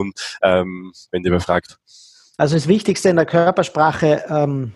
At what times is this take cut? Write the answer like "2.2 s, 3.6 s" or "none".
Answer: 1.1 s